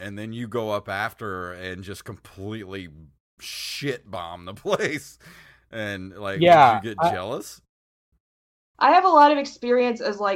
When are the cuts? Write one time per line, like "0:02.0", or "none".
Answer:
0:08.7